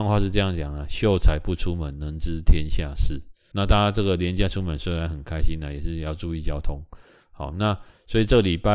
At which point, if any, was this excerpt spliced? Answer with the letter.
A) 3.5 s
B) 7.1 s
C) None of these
A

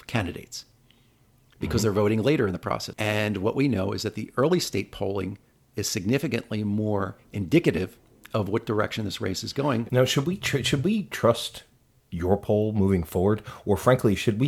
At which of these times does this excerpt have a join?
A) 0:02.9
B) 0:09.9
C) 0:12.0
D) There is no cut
A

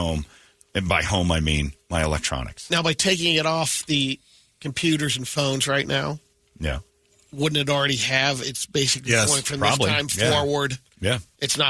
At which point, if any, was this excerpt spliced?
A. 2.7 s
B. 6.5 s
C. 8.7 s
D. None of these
D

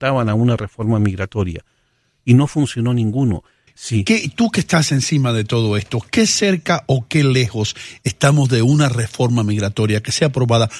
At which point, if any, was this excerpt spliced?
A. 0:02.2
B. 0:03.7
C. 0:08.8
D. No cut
B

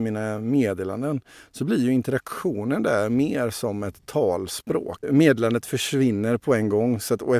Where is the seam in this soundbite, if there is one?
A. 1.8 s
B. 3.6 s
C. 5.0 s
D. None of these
C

